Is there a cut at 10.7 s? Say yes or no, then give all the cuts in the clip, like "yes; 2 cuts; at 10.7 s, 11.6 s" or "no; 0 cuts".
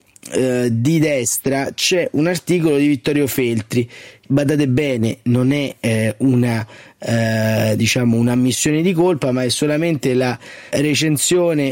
yes; 2 cuts; at 4.2 s, 10.7 s